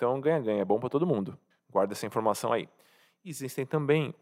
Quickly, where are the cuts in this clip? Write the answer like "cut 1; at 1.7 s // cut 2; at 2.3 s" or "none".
cut 1; at 1.5 s